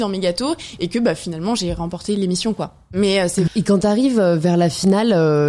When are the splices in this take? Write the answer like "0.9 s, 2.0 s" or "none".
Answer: 3.5 s